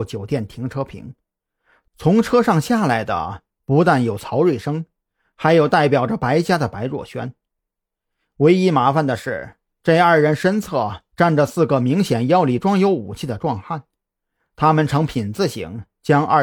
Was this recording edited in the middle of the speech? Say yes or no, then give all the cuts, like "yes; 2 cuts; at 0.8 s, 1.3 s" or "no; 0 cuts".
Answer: no; 0 cuts